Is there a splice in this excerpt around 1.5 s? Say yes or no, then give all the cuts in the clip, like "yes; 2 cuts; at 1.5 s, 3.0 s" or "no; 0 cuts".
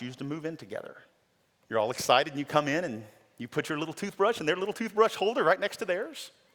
yes; 1 cut; at 1.5 s